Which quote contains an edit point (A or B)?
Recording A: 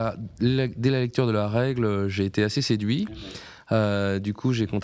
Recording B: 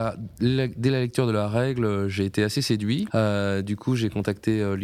B